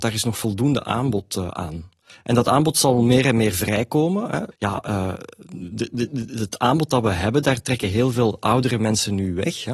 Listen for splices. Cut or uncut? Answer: cut